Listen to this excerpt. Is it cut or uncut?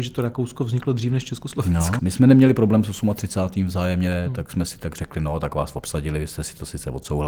cut